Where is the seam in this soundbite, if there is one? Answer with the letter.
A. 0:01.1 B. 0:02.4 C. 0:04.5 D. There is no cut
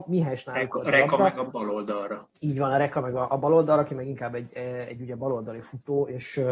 B